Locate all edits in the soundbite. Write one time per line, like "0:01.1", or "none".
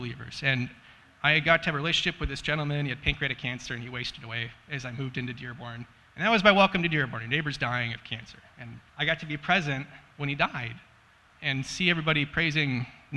0:08.9
0:11.3